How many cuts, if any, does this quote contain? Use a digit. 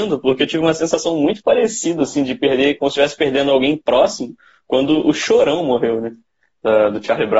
0